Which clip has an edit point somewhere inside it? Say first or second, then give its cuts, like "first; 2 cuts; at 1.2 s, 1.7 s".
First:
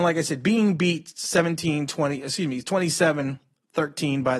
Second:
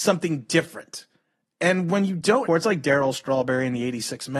second; 1 cut; at 2.5 s